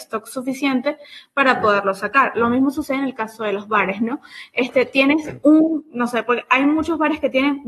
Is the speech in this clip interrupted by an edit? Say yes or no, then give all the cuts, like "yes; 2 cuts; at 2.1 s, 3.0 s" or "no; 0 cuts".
no; 0 cuts